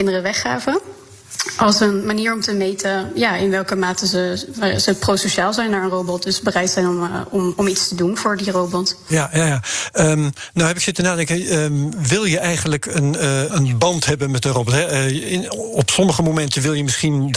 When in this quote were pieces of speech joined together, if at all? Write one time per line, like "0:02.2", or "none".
0:13.5